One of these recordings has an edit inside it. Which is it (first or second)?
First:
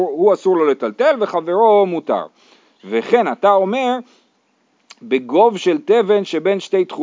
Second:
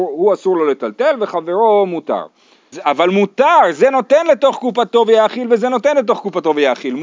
second